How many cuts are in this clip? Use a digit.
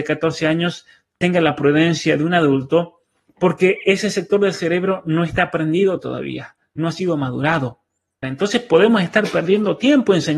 1